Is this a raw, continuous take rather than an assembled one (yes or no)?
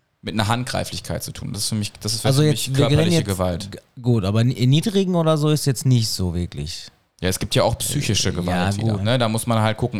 no